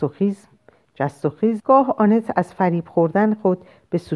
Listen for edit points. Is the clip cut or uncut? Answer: cut